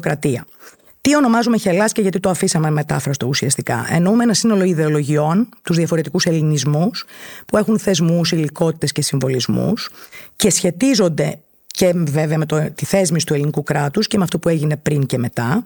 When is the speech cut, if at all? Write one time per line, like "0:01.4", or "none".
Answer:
none